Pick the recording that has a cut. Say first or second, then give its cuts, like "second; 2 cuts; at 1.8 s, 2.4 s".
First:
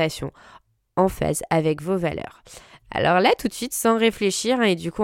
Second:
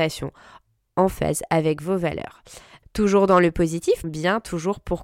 second; 2 cuts; at 2.8 s, 4.0 s